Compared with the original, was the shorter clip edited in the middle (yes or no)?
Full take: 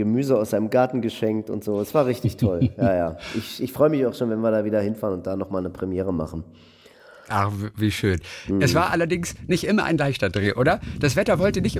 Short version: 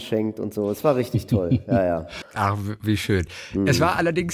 yes